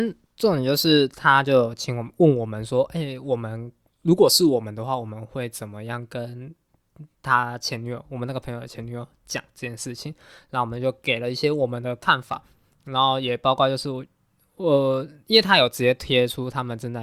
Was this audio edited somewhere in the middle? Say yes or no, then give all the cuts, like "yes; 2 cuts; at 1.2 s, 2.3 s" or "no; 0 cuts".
no; 0 cuts